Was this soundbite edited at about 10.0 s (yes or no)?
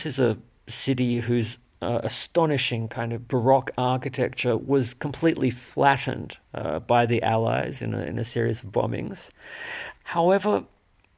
yes